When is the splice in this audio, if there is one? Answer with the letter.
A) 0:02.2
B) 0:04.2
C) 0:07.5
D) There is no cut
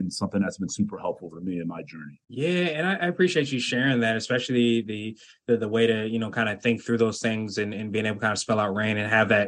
A